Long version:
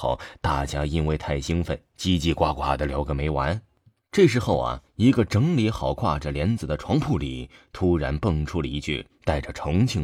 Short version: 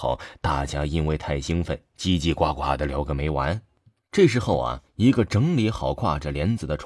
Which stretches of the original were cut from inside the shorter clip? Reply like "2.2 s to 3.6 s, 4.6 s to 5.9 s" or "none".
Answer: none